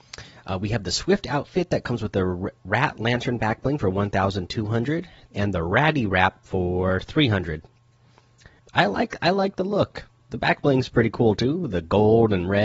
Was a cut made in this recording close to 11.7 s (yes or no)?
no